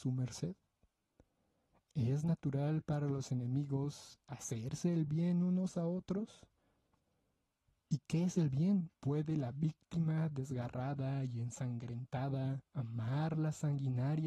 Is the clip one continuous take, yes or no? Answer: no